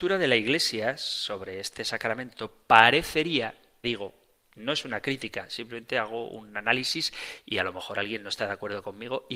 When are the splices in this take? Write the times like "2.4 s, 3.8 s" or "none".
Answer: 3.8 s